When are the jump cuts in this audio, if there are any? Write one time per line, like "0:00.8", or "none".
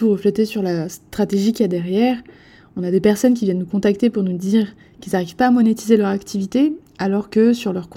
none